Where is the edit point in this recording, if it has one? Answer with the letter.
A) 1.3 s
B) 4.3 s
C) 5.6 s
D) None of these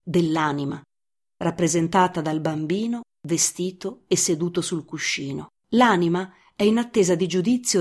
C